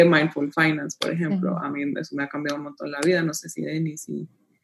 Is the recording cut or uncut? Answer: uncut